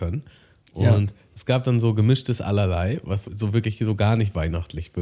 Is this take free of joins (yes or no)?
no